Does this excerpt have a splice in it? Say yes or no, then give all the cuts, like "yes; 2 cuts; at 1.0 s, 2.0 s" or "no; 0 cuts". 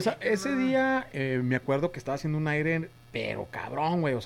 yes; 1 cut; at 1.1 s